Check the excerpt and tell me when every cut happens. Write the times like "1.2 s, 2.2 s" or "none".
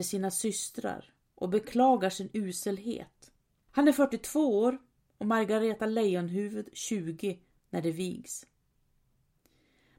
3.7 s